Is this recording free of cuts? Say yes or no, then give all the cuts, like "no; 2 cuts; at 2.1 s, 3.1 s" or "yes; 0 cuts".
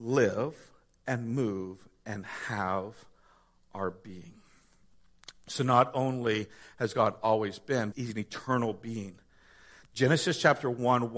no; 1 cut; at 7.9 s